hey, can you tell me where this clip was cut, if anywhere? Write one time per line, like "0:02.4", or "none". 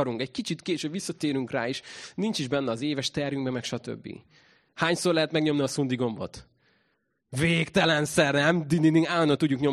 0:04.7